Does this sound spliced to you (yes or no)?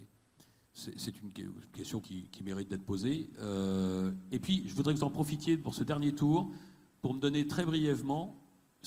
yes